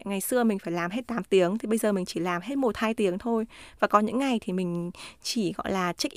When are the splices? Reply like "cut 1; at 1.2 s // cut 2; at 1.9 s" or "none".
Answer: none